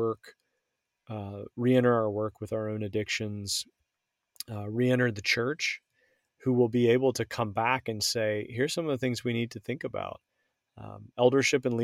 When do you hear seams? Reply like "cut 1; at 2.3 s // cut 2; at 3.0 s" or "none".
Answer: cut 1; at 6.3 s

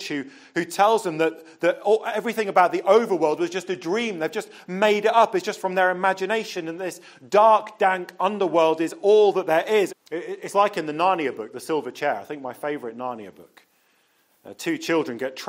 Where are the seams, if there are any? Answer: cut 1; at 9.9 s

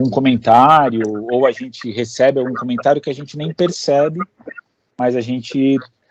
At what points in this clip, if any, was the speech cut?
none

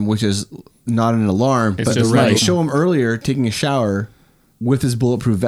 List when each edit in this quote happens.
cut 1; at 2.4 s

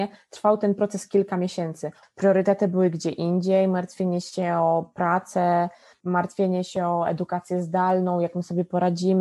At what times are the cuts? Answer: cut 1; at 2.0 s

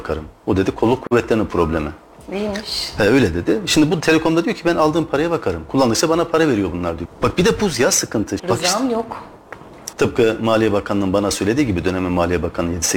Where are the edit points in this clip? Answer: cut 1; at 7.0 s // cut 2; at 8.4 s // cut 3; at 9.9 s

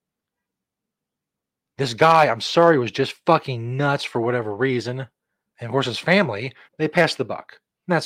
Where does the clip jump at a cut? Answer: cut 1; at 5.5 s // cut 2; at 6.7 s

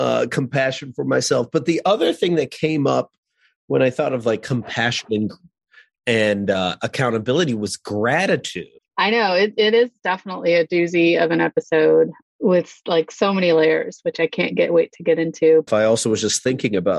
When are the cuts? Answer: cut 1; at 8.8 s // cut 2; at 15.7 s

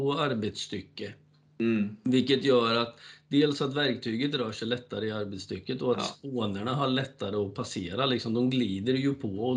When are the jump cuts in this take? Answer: none

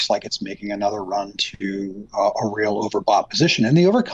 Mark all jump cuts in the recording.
none

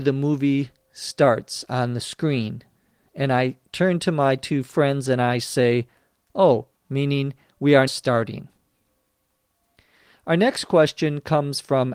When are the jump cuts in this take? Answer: cut 1; at 6.8 s // cut 2; at 7.9 s

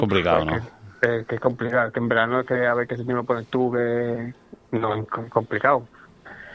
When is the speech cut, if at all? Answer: none

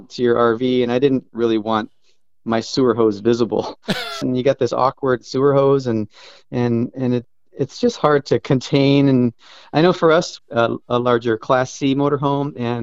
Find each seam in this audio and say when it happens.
cut 1; at 4.2 s // cut 2; at 10.4 s

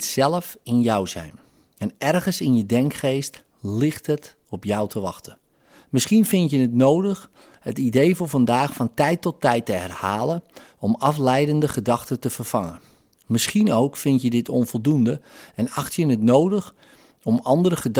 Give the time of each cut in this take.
none

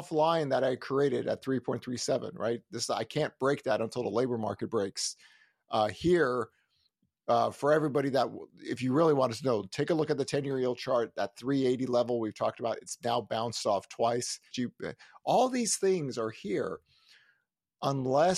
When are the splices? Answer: cut 1; at 14.5 s

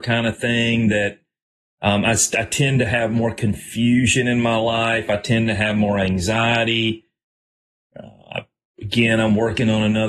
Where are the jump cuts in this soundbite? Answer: none

